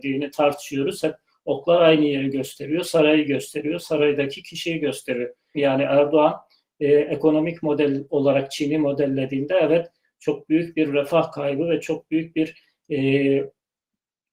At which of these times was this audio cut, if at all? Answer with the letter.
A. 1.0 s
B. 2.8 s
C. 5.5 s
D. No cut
C